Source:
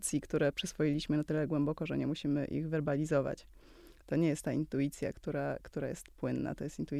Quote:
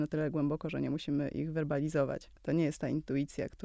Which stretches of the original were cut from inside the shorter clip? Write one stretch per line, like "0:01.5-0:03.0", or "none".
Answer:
0:03.5-0:04.0